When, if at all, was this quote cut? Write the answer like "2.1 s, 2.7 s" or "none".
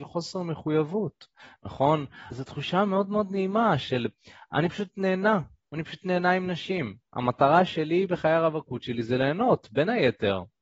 2.3 s